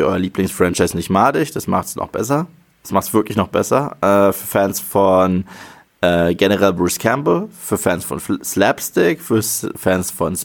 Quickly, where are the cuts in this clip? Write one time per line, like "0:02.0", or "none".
none